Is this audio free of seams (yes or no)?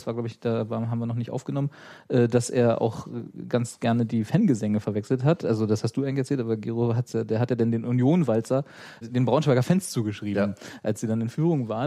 no